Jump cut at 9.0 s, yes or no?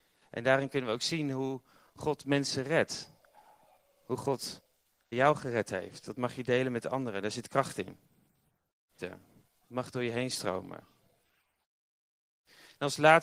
yes